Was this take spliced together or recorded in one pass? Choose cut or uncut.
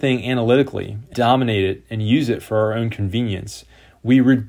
cut